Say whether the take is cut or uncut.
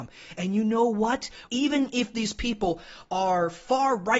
cut